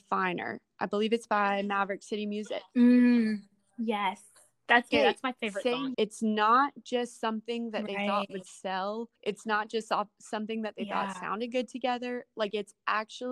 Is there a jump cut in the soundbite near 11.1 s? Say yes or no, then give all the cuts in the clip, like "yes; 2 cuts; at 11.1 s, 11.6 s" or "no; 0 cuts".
no; 3 cuts; at 4.9 s, 5.9 s, 9.2 s